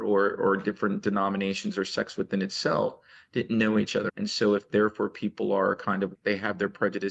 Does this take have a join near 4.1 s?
yes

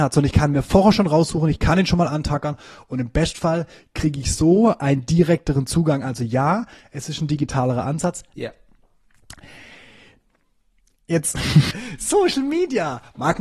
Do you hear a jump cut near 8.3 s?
yes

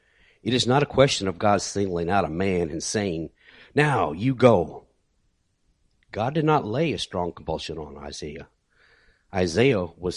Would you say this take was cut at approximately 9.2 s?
no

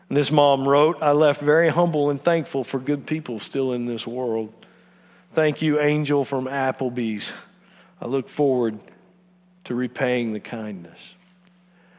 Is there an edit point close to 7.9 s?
no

